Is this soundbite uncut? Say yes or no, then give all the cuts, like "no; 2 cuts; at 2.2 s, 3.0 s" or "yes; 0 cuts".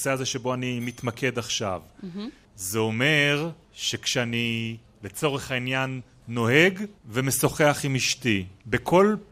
yes; 0 cuts